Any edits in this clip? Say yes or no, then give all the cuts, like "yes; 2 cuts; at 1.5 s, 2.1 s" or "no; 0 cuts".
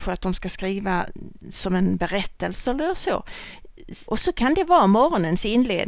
yes; 1 cut; at 4.1 s